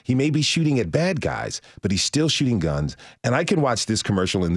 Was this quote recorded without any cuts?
yes; 0 cuts

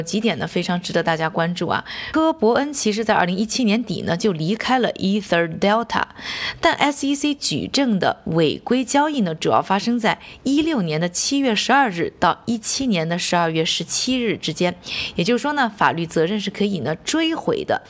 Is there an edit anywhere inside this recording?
yes; 1 cut; at 2.1 s

